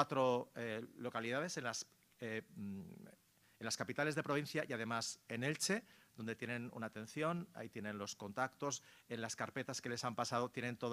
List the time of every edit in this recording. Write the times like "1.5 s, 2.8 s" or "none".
none

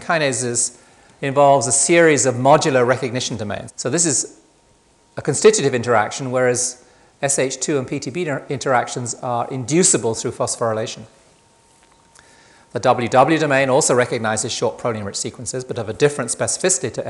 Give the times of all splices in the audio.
3.7 s

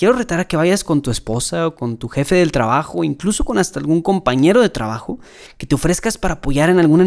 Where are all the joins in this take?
5.5 s

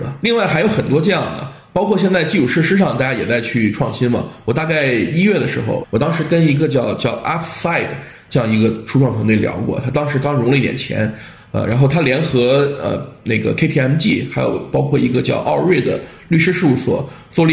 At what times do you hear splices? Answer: 5.8 s

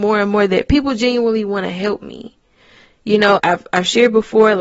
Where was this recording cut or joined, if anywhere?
3.4 s

